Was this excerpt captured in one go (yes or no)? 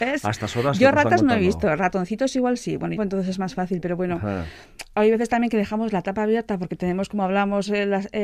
no